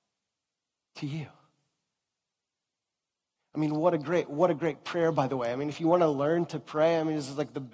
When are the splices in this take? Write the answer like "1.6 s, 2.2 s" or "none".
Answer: none